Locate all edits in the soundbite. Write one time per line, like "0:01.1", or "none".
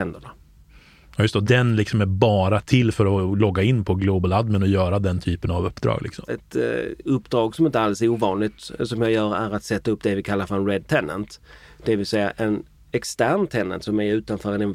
0:06.3